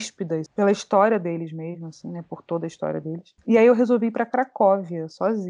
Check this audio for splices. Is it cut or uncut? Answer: uncut